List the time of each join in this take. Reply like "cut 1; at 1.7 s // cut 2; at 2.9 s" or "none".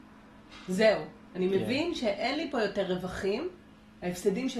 none